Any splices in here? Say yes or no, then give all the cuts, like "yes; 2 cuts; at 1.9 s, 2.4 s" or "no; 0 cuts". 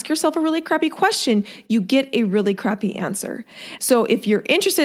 yes; 1 cut; at 3.8 s